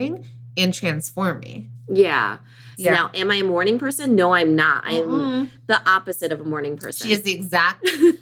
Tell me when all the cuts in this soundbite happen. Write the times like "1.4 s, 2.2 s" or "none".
2.8 s